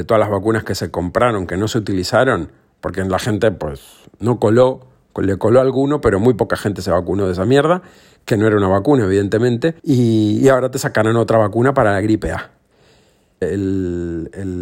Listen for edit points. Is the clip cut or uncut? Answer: cut